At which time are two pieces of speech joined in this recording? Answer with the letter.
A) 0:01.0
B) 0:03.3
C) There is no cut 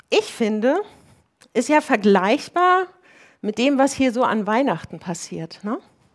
C